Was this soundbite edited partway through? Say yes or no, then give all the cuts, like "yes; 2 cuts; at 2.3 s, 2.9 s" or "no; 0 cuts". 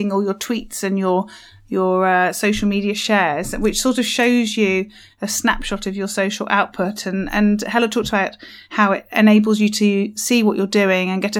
no; 0 cuts